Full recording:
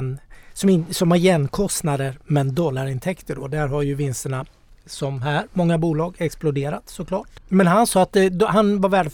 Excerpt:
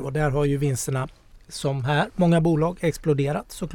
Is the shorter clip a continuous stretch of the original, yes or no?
yes